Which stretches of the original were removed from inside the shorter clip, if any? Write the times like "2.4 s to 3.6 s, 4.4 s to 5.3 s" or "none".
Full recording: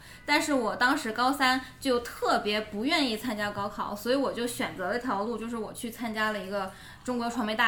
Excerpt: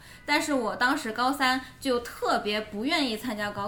none